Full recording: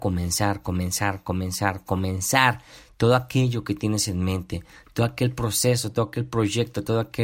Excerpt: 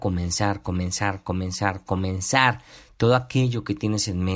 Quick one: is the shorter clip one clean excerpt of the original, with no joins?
yes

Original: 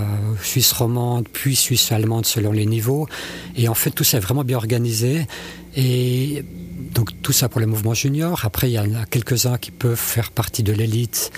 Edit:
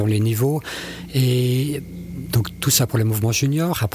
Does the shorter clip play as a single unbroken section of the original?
no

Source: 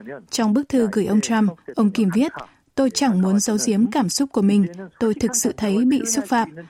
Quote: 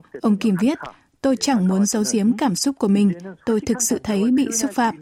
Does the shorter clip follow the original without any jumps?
yes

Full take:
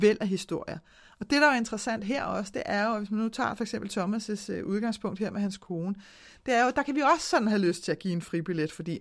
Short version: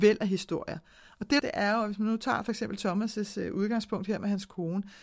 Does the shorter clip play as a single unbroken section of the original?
no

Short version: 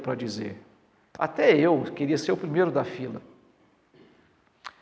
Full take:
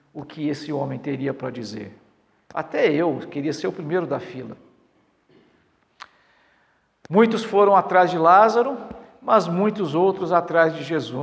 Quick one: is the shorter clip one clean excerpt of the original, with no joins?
yes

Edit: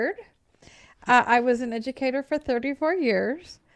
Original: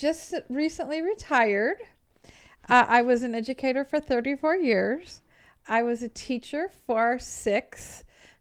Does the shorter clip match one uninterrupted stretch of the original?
yes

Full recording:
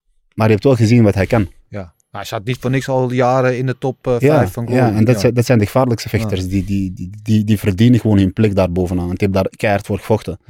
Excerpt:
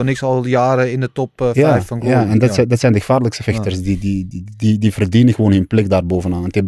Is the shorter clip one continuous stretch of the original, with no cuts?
yes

